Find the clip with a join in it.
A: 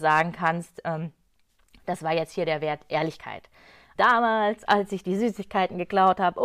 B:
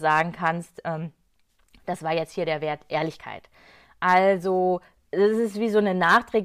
A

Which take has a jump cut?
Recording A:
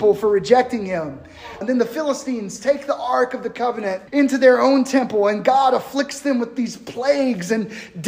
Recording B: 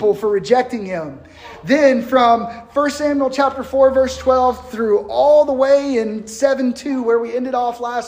A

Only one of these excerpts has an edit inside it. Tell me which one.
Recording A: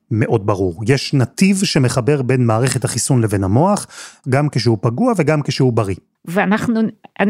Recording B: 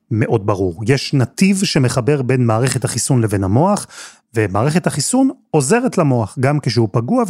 A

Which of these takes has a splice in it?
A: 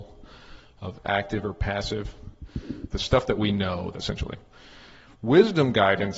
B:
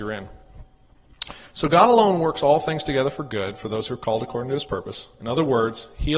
A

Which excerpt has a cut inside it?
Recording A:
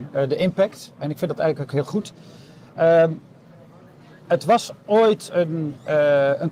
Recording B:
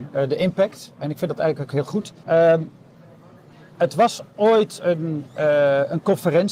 B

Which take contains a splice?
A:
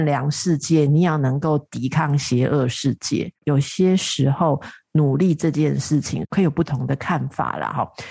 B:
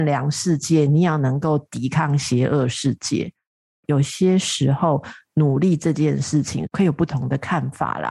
A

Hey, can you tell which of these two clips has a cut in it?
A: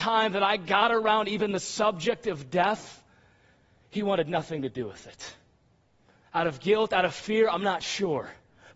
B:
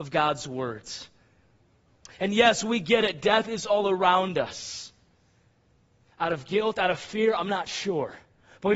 B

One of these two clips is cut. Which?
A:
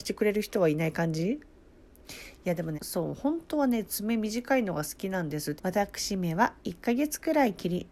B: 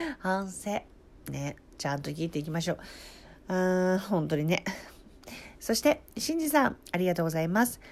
A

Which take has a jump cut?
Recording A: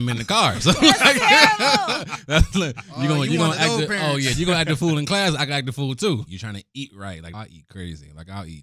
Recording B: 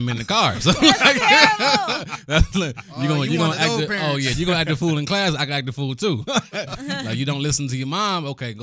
A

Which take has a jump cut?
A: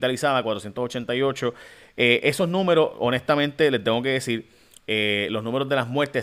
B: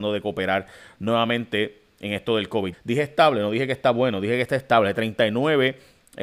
B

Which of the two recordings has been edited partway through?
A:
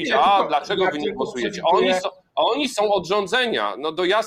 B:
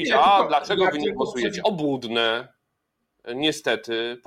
B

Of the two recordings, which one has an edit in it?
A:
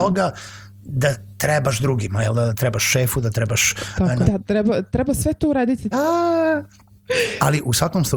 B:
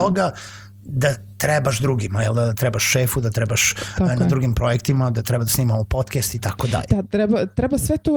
A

